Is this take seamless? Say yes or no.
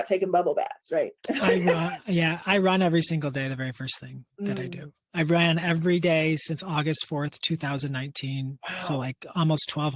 no